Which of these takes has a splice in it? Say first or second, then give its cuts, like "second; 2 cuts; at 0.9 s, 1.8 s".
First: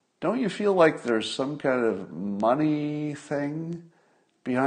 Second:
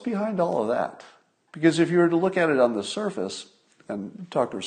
second; 1 cut; at 1.5 s